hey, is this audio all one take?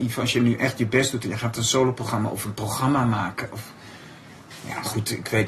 yes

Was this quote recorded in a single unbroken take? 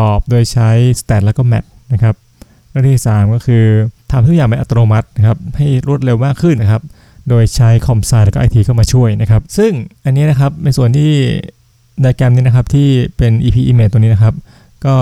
no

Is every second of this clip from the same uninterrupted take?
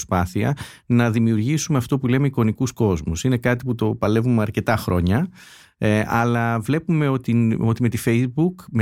yes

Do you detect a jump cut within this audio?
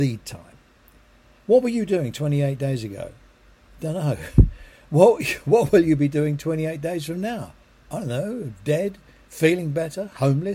no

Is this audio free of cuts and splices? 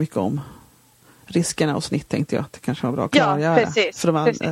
yes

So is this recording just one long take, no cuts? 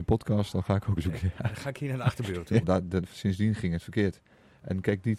no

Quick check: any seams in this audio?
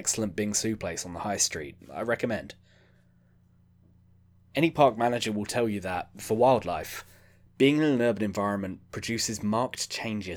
no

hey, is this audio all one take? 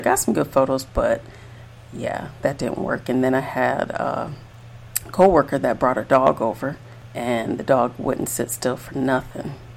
yes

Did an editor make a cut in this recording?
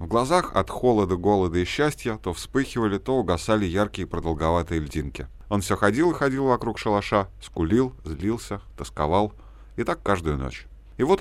yes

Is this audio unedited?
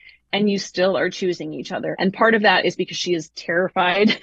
no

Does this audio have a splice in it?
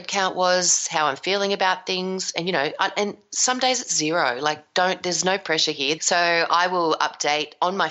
yes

